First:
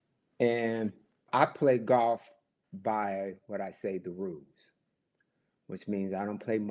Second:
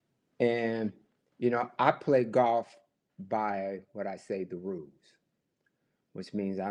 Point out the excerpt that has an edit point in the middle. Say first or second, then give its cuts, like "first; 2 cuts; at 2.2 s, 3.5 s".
first; 1 cut; at 1.3 s